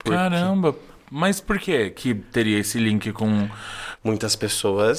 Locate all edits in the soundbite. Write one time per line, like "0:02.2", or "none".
0:04.0